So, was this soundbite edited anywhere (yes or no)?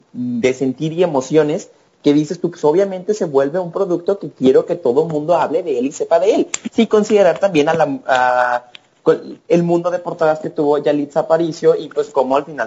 no